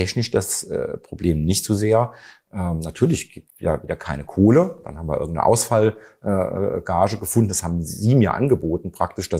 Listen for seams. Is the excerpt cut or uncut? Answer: uncut